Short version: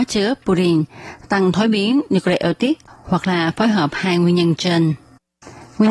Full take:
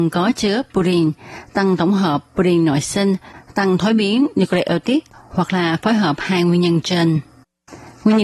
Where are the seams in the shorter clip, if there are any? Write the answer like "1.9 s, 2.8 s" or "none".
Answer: 1.2 s